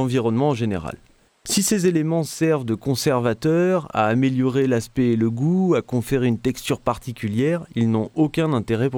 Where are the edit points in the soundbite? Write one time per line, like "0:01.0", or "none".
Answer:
0:01.3

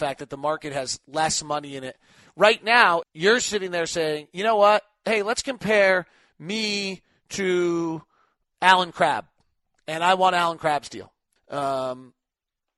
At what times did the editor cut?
0:03.0
0:11.4

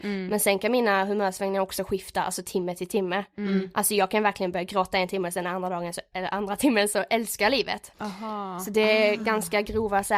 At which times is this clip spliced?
0:06.1
0:07.9

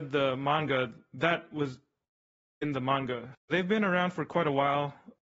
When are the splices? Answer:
0:03.3

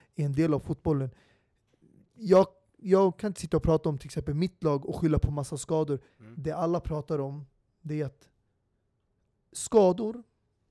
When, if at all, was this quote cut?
0:06.1

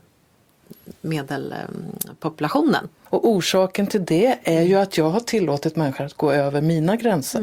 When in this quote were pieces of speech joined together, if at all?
0:03.1

